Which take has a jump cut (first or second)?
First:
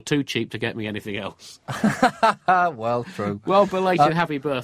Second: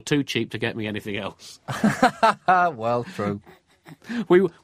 second